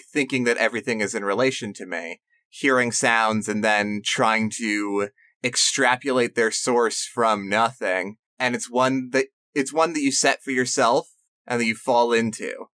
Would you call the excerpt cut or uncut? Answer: cut